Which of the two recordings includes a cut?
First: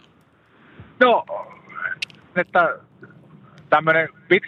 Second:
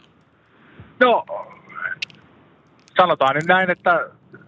first; 1 cut; at 2.4 s

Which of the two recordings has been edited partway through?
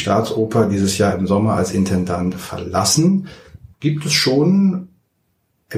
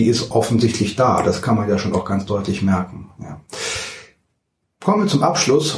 first; 1 cut; at 3.7 s

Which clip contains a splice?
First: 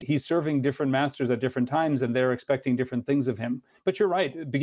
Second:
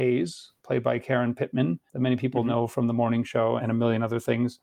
second; 1 cut; at 3.6 s

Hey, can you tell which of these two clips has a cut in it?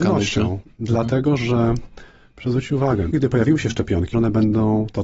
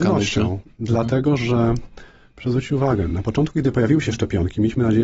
first; 2 cuts; at 3.1 s, 4.1 s

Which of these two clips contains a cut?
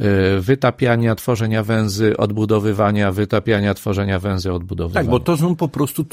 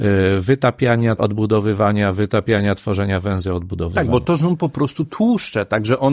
second; 1 cut; at 1.2 s

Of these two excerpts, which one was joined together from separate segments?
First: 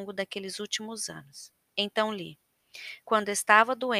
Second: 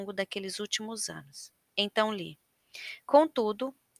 first; 1 cut; at 3.0 s

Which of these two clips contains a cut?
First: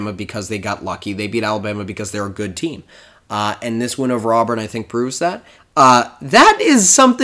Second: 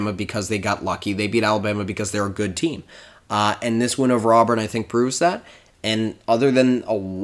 first; 1 cut; at 5.6 s

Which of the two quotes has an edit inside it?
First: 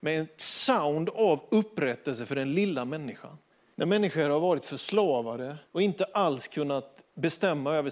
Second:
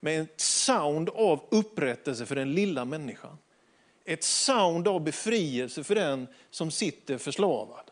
first; 2 cuts; at 3.7 s, 5.7 s

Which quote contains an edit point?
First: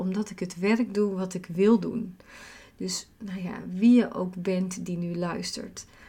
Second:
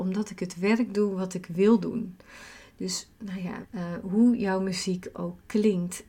second; 1 cut; at 3.6 s

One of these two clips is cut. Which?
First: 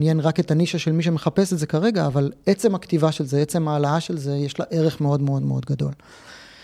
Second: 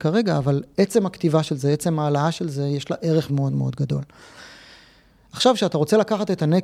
second; 1 cut; at 3.3 s

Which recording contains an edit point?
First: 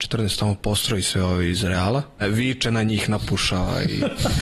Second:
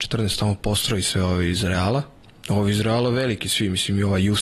first; 1 cut; at 2.2 s

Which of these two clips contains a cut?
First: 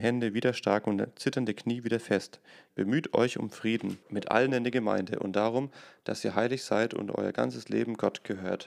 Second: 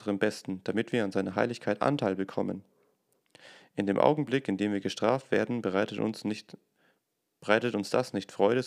first; 2 cuts; at 2.7 s, 4.0 s

